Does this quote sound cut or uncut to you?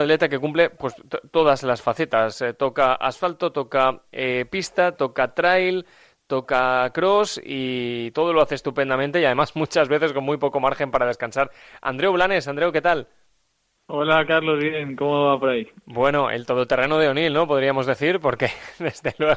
uncut